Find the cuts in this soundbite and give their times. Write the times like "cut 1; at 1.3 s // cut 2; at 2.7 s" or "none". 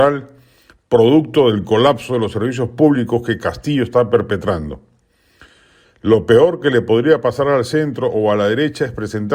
cut 1; at 5.8 s